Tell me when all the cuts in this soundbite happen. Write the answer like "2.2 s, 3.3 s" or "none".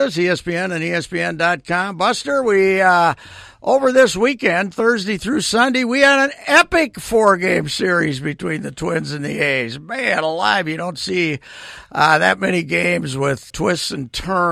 13.5 s